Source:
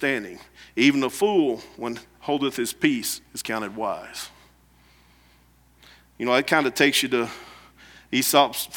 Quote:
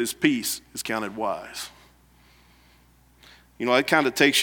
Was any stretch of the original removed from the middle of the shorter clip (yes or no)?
no